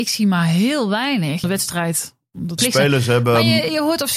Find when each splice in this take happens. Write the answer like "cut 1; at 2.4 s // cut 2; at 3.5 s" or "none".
cut 1; at 1.4 s // cut 2; at 2.6 s

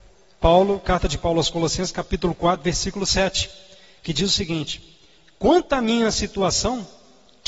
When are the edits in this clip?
none

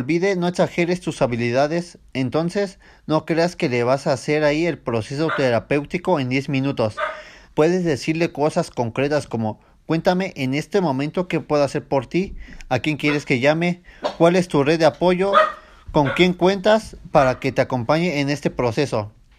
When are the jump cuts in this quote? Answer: cut 1; at 7.4 s

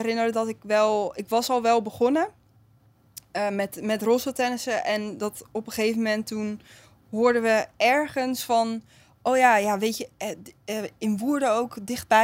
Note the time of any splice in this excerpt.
none

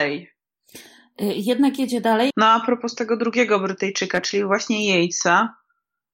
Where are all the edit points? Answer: cut 1; at 2.3 s

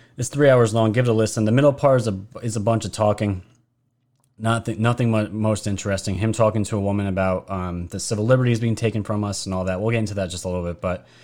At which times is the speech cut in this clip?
none

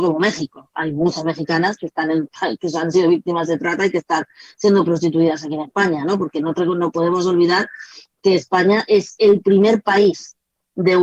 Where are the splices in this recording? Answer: none

